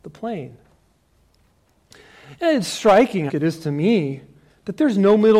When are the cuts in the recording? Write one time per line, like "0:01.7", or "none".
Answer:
0:03.3